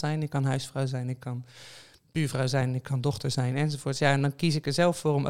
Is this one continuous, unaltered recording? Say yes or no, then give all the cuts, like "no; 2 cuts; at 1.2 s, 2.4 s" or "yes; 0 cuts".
yes; 0 cuts